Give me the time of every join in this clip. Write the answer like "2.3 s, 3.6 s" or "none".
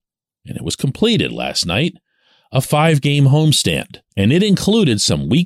4.1 s